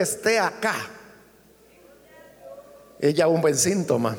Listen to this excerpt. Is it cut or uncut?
uncut